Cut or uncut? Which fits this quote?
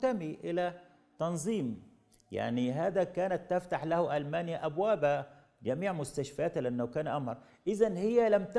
uncut